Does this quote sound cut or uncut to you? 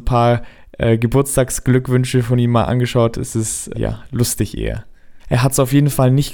cut